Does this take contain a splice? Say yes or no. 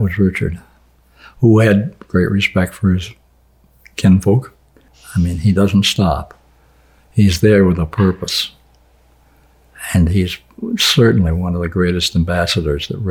yes